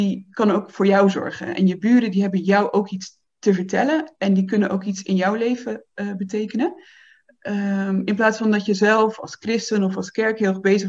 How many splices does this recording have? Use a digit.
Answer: 0